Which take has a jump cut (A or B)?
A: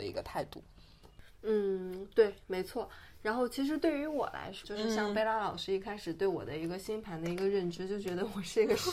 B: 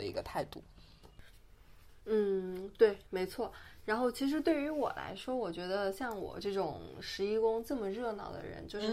A